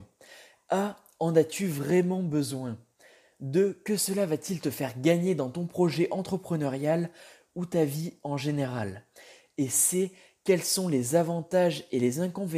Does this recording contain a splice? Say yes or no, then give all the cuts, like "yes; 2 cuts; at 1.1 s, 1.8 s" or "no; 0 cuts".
no; 0 cuts